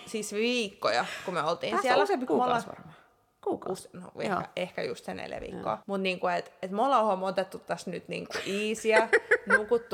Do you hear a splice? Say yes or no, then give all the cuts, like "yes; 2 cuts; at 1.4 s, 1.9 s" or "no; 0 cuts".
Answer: yes; 2 cuts; at 2.3 s, 5.8 s